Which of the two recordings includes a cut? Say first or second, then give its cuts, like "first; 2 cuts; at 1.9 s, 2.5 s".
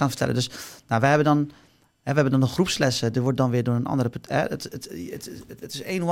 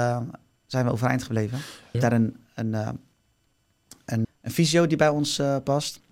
second; 2 cuts; at 1.9 s, 4.2 s